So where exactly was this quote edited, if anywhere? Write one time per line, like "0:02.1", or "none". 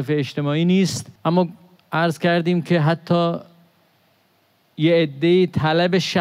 0:01.2